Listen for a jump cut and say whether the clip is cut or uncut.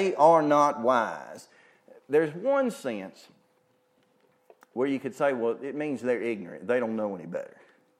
uncut